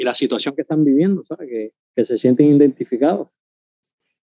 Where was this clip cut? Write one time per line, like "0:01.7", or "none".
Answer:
none